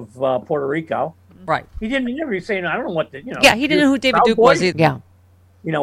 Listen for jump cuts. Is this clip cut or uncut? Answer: cut